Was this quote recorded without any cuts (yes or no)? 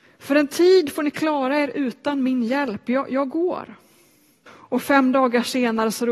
no